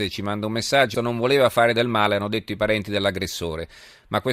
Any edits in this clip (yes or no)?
yes